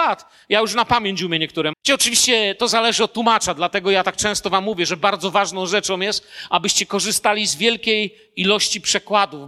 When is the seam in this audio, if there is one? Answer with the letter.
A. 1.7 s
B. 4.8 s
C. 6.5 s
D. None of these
A